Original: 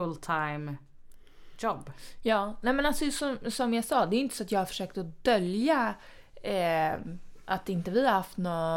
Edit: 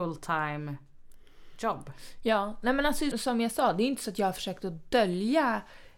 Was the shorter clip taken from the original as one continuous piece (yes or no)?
no